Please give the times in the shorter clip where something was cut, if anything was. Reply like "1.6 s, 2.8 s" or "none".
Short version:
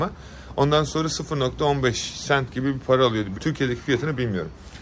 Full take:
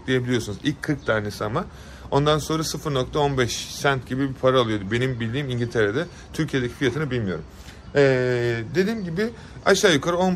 3.3 s

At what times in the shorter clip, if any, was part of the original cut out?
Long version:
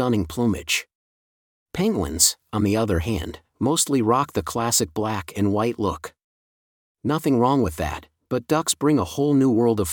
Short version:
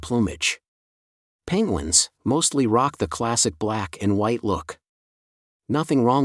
2.2 s

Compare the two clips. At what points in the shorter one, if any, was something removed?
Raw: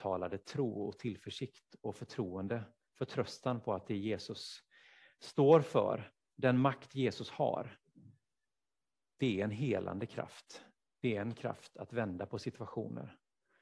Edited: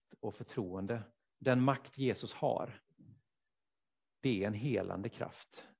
1.3 s

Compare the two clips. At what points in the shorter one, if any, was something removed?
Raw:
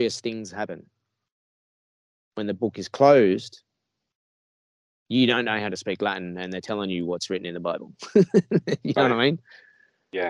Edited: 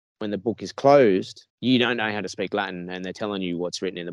1.5 s

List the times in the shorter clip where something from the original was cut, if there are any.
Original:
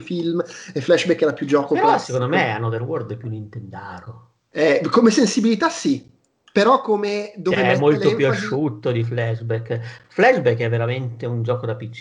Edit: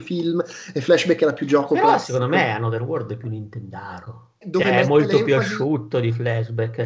4.4 s

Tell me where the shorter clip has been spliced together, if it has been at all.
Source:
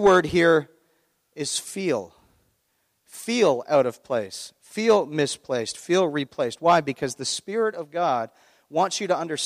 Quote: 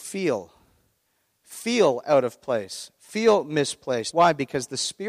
4.1 s

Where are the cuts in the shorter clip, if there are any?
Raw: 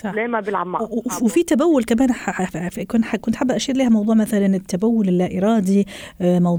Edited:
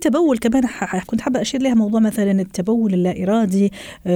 1.1 s

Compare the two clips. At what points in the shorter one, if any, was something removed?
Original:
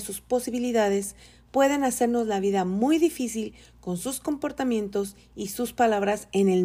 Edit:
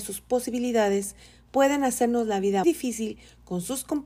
2.6 s

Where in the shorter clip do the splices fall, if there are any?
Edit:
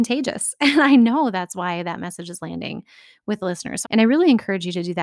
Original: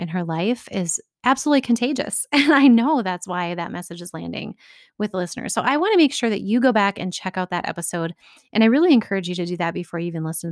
3.8 s

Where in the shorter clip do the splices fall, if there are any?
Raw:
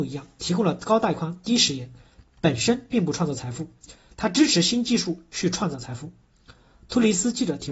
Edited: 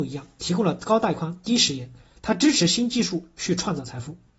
2.1 s

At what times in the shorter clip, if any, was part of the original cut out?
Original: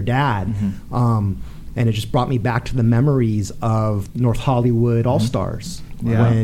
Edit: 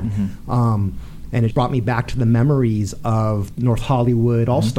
1.5 s

